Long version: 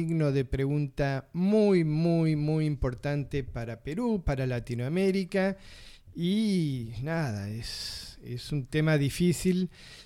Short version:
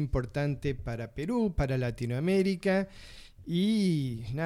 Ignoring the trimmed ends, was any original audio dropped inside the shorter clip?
no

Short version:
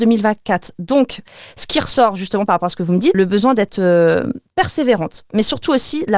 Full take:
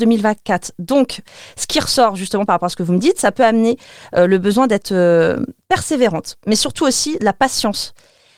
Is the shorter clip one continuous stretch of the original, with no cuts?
no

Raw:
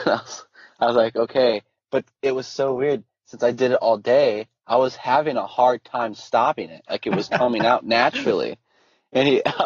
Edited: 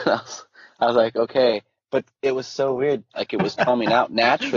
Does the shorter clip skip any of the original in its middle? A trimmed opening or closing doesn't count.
yes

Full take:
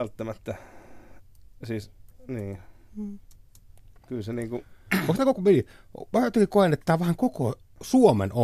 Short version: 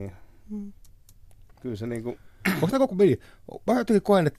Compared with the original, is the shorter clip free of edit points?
yes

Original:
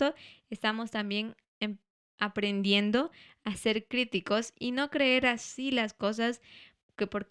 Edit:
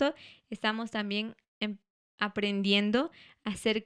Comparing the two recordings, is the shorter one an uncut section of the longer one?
yes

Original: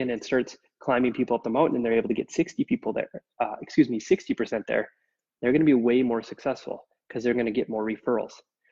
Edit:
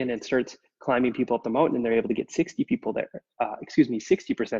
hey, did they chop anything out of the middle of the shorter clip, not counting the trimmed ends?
no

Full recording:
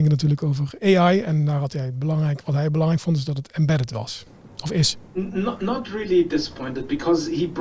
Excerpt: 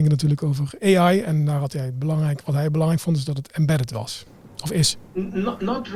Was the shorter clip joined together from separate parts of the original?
no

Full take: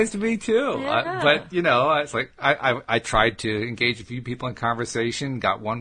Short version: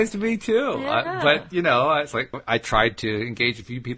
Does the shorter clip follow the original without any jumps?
no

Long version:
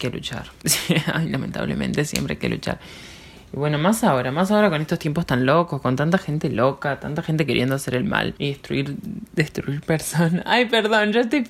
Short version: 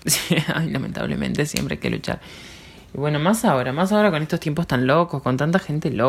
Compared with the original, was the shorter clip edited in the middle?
no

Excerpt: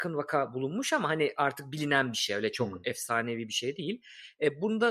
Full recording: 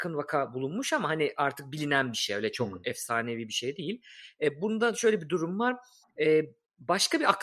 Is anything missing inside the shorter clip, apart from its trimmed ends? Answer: no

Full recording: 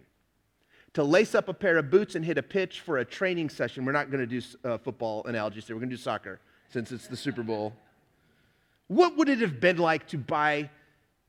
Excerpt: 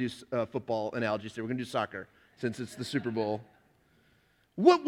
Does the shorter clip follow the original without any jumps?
yes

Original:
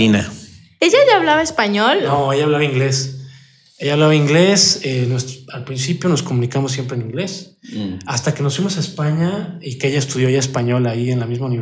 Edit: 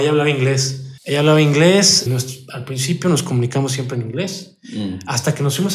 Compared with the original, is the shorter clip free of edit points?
no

